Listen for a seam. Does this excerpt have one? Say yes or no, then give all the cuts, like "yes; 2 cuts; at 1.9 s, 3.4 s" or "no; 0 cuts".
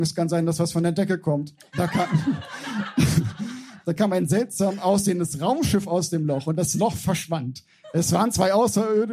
no; 0 cuts